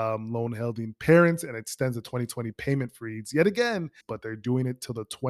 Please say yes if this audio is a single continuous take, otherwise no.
no